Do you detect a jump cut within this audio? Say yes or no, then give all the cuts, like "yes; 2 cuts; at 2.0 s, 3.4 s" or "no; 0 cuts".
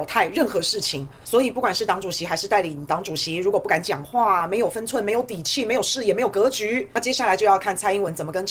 no; 0 cuts